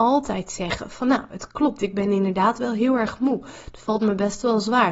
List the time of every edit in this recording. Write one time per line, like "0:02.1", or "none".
none